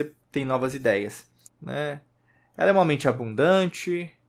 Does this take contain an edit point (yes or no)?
yes